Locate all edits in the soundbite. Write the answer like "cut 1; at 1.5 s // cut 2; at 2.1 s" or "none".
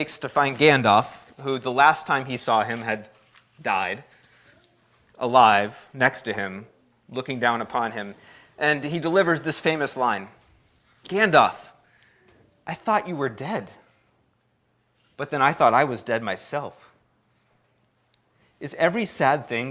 none